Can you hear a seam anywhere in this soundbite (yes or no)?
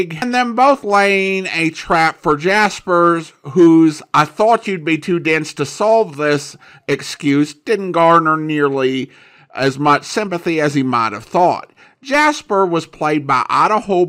no